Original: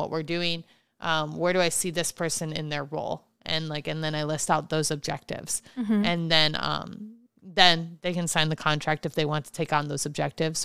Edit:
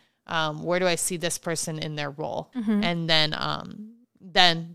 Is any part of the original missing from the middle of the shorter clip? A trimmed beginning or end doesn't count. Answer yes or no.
yes